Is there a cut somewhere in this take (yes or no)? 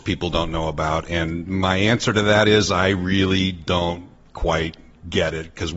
no